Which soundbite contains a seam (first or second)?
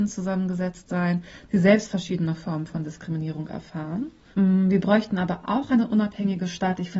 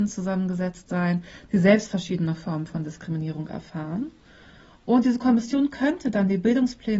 first